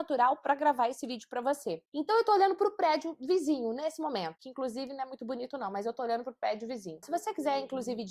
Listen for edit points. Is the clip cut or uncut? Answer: cut